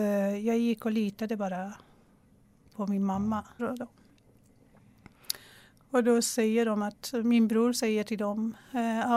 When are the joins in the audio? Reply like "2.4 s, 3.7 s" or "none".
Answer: 3.6 s